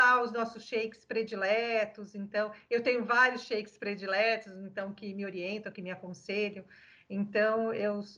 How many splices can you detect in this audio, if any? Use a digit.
0